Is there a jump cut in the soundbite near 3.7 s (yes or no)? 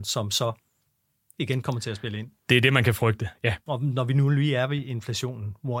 yes